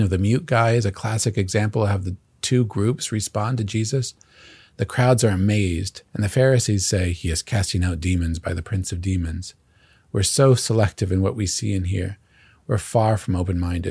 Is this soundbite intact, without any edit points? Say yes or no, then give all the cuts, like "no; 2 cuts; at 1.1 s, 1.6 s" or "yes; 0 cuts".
no; 1 cut; at 6.1 s